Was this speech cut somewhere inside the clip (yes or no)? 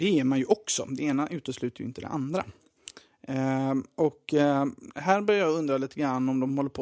no